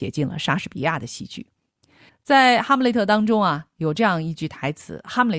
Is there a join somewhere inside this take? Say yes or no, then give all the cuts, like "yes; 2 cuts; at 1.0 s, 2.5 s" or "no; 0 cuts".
yes; 1 cut; at 2.1 s